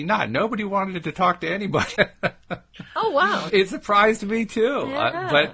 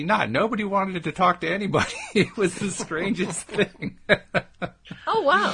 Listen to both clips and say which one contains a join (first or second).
first